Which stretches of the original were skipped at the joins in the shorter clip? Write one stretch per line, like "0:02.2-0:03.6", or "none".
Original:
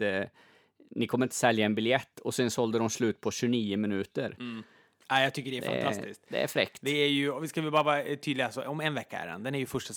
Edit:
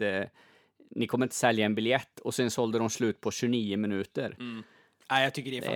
none